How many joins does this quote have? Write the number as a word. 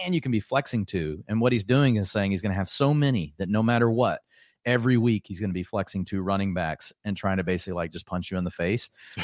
zero